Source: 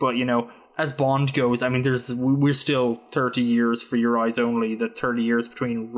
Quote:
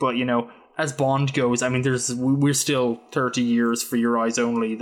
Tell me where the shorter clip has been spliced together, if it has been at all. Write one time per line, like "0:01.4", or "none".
none